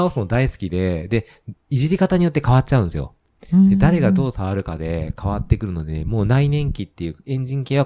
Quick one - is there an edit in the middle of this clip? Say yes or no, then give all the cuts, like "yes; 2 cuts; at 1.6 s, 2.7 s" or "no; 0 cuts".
no; 0 cuts